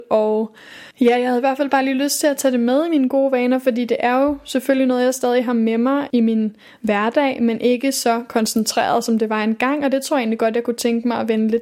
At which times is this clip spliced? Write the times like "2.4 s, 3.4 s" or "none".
0.9 s